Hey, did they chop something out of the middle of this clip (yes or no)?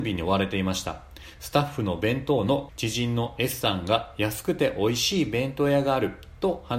yes